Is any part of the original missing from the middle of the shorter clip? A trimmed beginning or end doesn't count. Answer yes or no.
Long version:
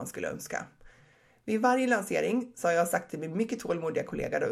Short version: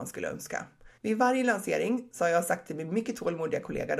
yes